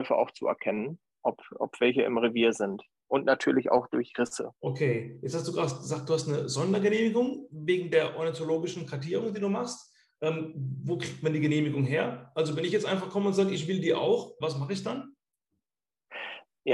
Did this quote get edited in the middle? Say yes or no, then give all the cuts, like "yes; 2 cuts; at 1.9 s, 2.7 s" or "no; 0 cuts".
yes; 2 cuts; at 4.6 s, 14.4 s